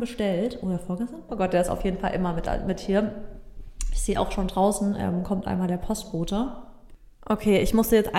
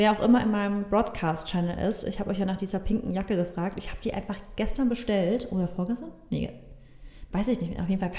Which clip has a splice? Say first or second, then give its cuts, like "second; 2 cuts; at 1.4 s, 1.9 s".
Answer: first; 1 cut; at 1.3 s